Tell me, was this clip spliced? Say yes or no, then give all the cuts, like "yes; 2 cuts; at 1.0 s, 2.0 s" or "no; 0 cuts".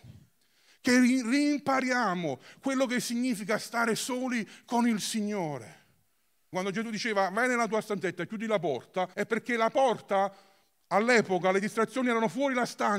yes; 2 cuts; at 6.5 s, 9.1 s